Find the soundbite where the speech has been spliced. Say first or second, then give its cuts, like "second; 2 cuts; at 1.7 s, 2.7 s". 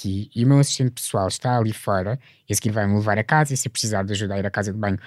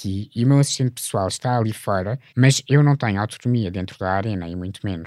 second; 1 cut; at 2.3 s